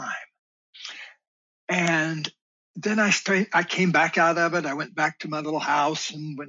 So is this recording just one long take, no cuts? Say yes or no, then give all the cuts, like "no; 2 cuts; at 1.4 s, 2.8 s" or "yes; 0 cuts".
yes; 0 cuts